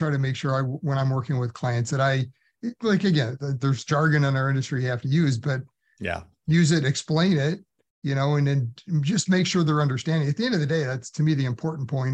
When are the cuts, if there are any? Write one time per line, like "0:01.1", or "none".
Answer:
none